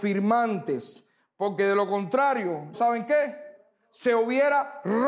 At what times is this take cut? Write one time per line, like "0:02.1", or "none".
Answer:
0:02.7